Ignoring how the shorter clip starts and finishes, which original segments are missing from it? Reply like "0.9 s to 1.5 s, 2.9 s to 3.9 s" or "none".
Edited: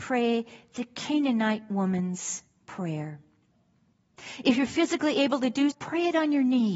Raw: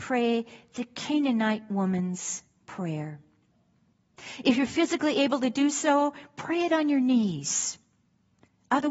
5.7 s to 6.3 s